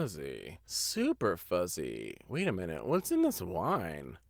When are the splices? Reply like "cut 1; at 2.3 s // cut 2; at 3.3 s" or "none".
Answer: cut 1; at 2.2 s